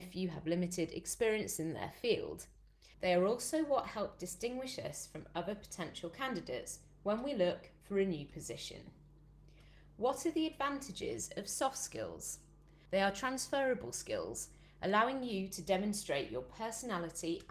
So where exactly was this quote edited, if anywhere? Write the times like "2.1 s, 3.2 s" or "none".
2.9 s, 12.9 s